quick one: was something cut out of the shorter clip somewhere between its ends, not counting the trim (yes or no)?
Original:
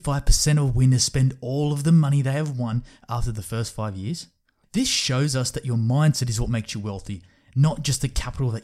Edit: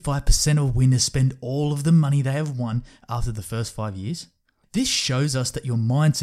no